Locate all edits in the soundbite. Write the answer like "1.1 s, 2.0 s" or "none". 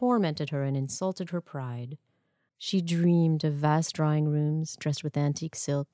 2.5 s